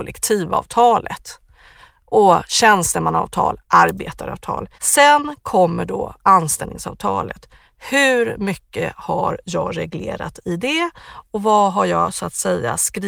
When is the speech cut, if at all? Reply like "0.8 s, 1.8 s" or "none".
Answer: 4.7 s